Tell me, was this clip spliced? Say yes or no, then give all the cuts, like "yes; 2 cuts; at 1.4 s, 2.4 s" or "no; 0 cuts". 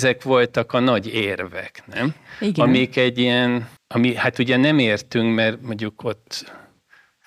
yes; 1 cut; at 3.8 s